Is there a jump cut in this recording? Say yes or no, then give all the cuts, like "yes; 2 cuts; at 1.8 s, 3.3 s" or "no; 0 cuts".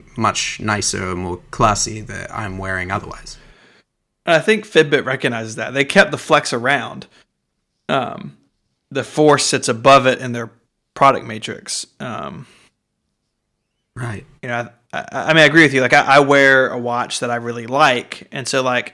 no; 0 cuts